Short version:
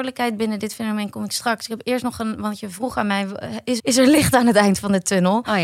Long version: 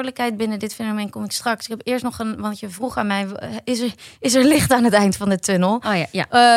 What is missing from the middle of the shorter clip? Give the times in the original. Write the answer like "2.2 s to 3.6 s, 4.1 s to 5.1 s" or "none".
3.8 s to 4.2 s